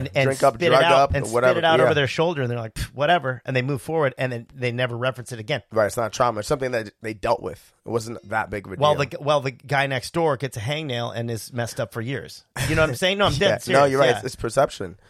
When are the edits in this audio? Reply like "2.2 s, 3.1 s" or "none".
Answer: 5.7 s

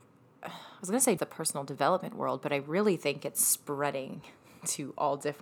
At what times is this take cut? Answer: 1.2 s

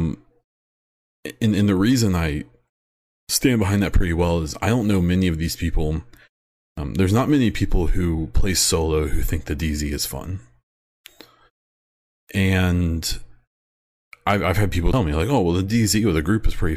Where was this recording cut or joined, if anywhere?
none

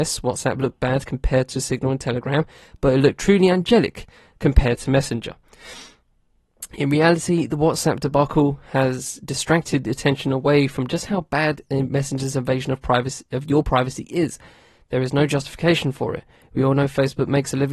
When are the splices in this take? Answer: none

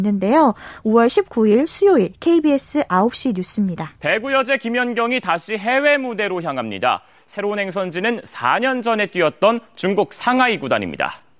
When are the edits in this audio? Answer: 4.0 s

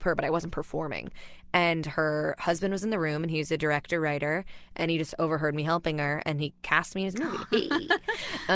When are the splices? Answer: 7.4 s

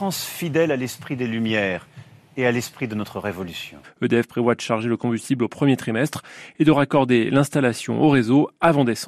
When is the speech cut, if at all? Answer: 3.8 s

